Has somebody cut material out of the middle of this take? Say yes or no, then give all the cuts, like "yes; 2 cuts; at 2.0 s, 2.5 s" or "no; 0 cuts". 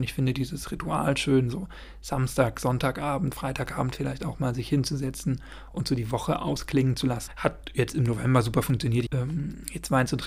yes; 2 cuts; at 7.3 s, 9.1 s